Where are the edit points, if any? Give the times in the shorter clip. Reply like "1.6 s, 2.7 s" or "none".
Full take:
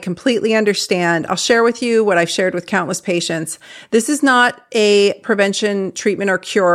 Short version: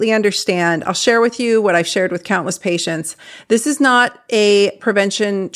none